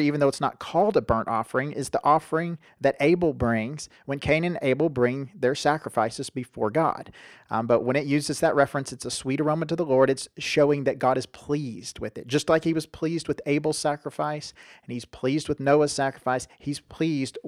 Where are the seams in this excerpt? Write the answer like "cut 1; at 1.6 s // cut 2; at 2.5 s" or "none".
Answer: cut 1; at 7.4 s